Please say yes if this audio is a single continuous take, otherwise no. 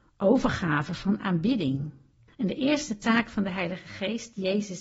no